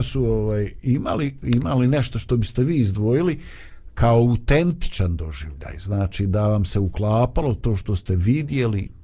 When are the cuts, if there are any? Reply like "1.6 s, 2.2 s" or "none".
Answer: none